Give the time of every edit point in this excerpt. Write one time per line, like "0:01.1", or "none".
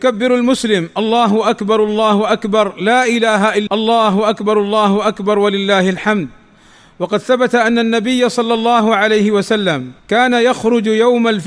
0:03.7
0:10.0